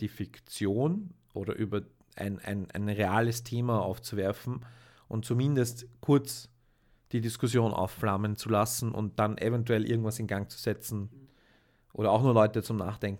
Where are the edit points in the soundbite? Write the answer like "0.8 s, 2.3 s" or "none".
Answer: none